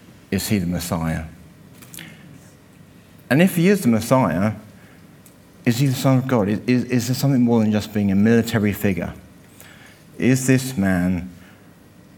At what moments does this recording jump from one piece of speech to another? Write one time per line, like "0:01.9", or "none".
none